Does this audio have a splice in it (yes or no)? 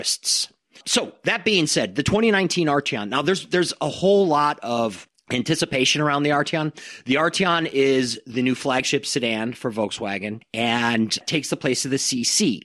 no